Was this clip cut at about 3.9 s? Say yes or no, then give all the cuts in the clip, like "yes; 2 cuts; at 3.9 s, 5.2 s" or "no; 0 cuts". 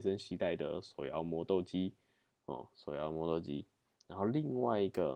yes; 1 cut; at 3.9 s